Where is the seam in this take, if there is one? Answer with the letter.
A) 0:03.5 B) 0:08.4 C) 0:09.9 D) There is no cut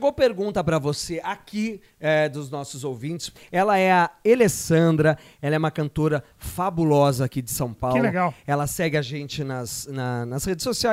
D